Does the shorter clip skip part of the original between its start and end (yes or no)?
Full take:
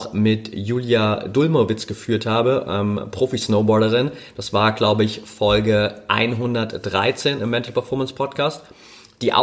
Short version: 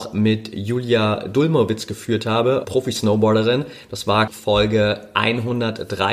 yes